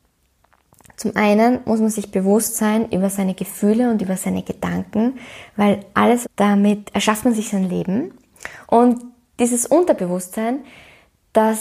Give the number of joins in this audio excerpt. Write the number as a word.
two